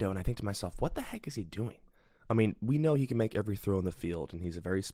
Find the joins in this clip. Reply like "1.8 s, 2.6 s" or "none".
none